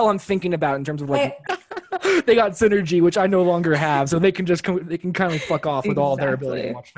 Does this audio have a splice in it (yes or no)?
yes